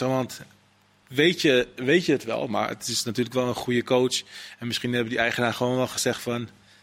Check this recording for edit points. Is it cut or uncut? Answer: uncut